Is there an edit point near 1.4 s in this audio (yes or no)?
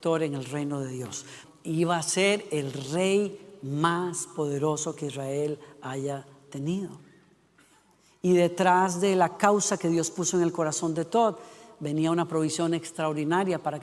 yes